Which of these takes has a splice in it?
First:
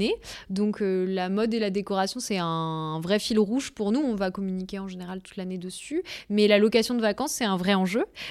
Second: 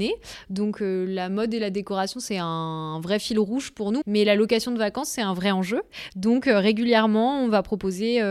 second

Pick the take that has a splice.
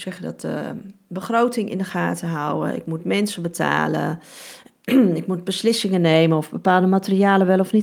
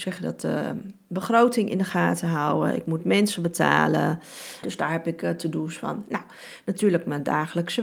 second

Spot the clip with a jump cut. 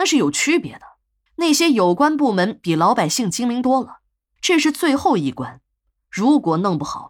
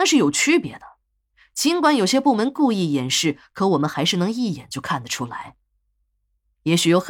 first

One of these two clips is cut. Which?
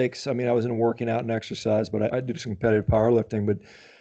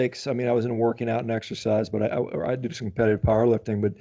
first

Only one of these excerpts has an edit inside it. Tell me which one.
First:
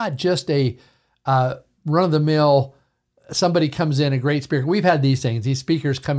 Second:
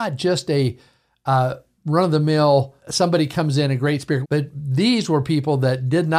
second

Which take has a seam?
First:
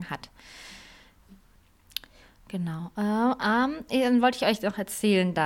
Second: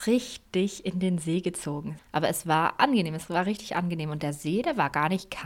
second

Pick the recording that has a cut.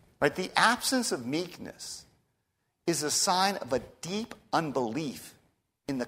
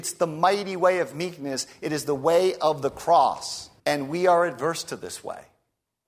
second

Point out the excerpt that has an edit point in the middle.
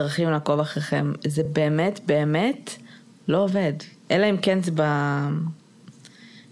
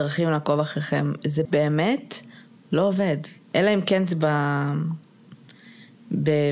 second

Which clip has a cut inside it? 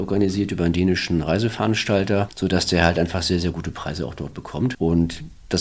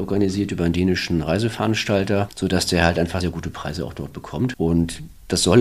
second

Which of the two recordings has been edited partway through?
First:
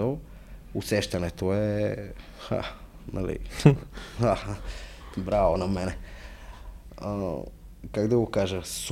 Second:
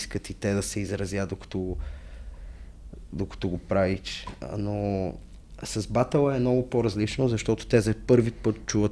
first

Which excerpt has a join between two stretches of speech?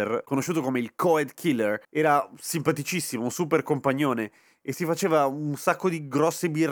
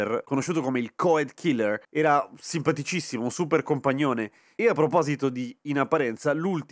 second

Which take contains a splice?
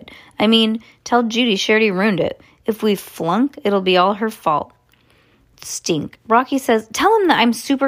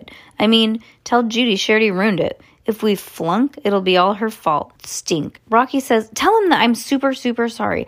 second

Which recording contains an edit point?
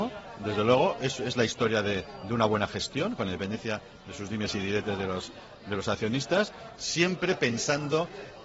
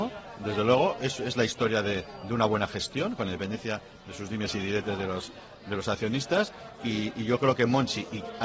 first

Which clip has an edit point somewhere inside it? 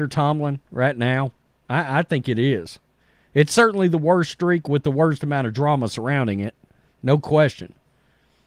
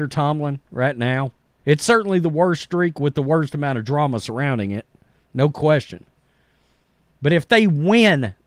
second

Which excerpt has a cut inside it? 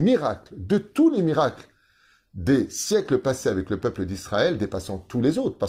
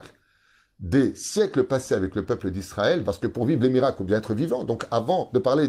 second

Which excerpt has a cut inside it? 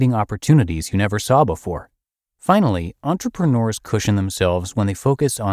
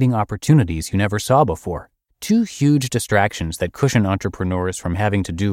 second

